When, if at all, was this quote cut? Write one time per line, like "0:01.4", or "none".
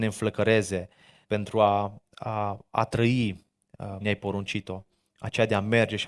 0:01.2
0:04.0